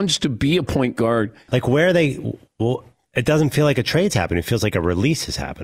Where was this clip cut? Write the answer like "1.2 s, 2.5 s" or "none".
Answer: 1.5 s